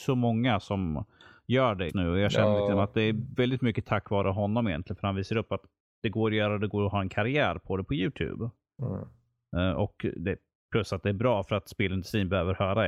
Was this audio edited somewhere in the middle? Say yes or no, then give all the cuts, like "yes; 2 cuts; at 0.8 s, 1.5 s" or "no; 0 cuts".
yes; 1 cut; at 1.9 s